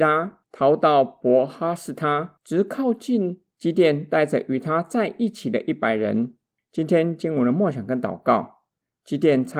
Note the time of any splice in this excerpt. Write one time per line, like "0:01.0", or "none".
0:02.4
0:03.5
0:06.6